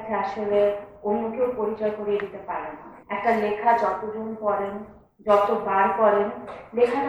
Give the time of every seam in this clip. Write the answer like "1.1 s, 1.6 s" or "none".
3.0 s